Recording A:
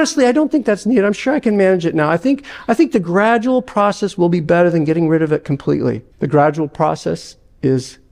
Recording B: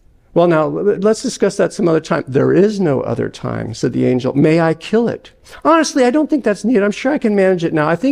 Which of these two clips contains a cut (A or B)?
A